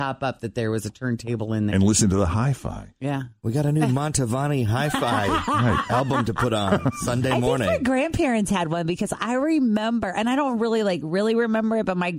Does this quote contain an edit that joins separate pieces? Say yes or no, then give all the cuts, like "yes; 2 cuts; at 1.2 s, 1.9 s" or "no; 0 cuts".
yes; 1 cut; at 1.7 s